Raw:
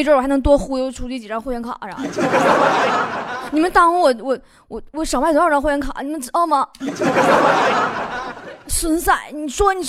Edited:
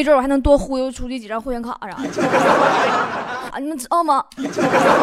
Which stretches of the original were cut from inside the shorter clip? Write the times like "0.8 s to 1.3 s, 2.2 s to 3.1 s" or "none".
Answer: 3.5 s to 5.9 s